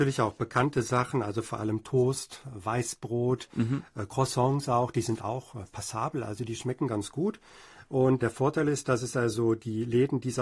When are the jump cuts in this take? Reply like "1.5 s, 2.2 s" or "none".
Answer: 8.2 s